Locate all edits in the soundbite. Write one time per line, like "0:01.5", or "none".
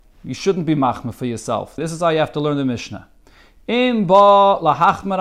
0:01.8